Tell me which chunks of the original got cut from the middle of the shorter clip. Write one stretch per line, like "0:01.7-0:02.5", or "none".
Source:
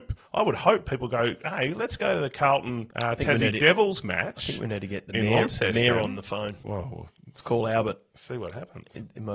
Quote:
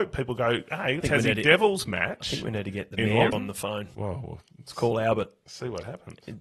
0:01.7-0:03.2
0:05.5-0:06.0